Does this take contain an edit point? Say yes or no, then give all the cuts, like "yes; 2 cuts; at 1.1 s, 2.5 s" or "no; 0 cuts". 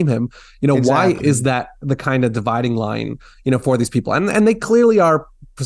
no; 0 cuts